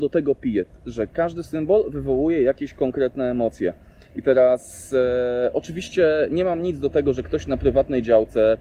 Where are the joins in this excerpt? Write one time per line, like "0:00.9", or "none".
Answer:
none